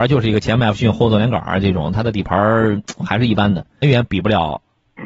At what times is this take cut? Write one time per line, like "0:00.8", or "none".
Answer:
0:03.8